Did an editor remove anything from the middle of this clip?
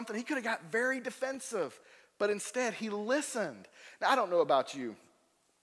no; 0 cuts

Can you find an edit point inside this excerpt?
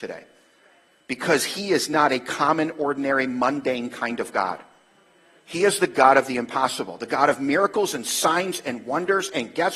no; 0 cuts

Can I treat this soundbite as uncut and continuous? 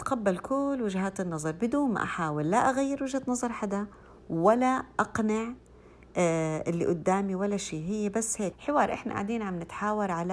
no; 1 cut; at 8.5 s

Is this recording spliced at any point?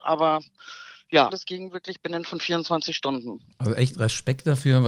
yes; 1 cut; at 1.3 s

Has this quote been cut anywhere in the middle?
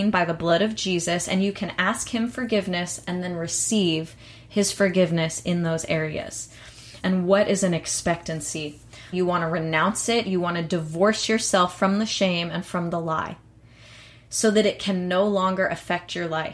yes; 2 cuts; at 7.0 s, 9.1 s

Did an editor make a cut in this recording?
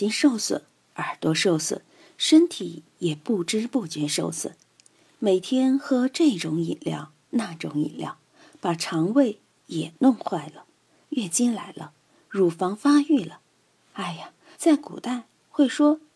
yes; 2 cuts; at 11.0 s, 14.5 s

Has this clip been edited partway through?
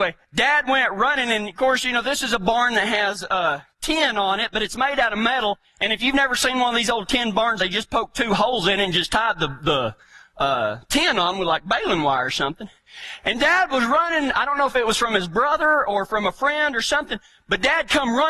no; 0 cuts

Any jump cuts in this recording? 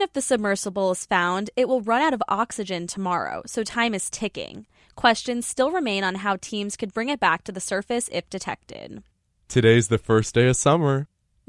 no; 0 cuts

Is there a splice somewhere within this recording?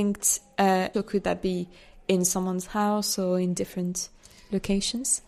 yes; 1 cut; at 0.9 s

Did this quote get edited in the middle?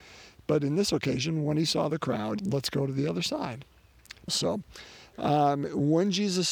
yes; 2 cuts; at 2.4 s, 4.3 s

